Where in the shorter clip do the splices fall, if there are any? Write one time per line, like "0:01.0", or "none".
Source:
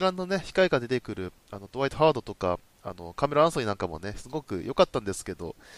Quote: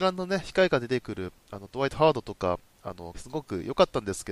0:03.1